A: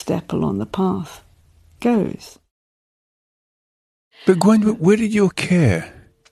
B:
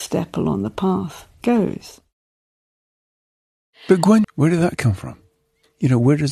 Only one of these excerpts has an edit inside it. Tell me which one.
B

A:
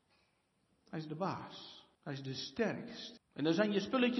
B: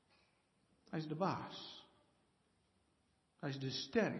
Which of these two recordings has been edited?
A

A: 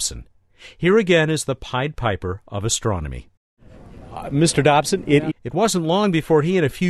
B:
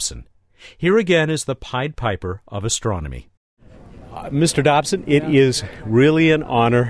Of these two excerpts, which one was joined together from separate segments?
A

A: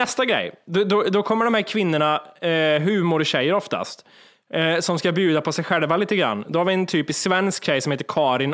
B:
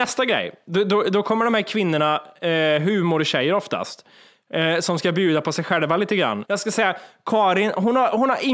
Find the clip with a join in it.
B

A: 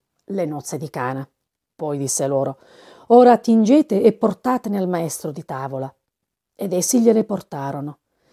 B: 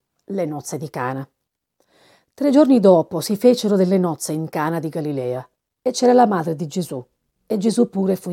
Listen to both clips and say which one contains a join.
A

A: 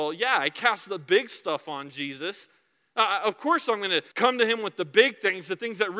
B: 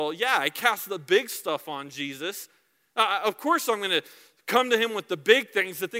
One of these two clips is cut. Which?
A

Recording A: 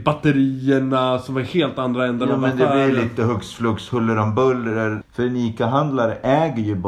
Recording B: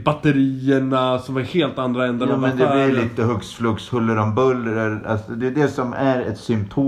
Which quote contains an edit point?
A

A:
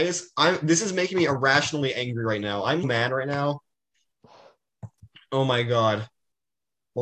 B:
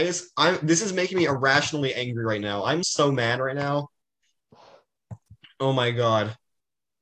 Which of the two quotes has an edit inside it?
A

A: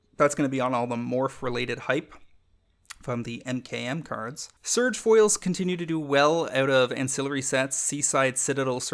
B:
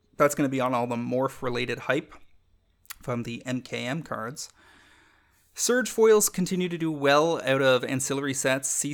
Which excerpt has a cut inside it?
A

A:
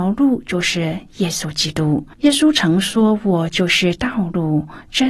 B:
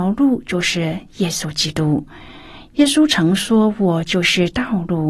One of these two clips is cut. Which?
A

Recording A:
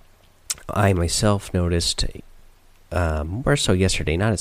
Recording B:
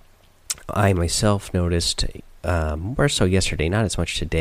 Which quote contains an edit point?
B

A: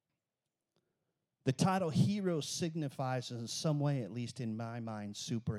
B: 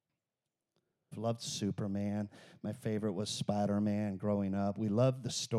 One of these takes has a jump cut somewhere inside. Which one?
B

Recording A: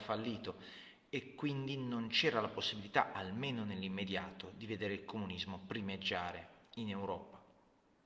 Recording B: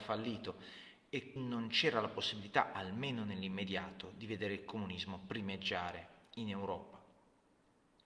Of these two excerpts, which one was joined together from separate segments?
B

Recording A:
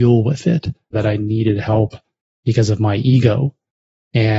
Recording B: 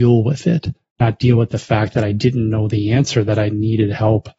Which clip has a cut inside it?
A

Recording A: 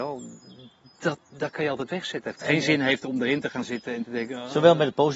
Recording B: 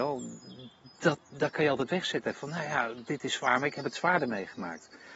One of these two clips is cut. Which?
A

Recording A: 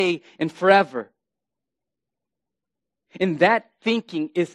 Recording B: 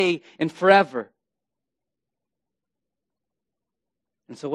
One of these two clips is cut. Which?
A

